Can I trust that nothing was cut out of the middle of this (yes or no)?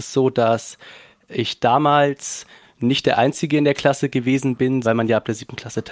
no